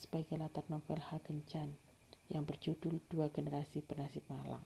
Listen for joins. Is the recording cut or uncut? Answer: uncut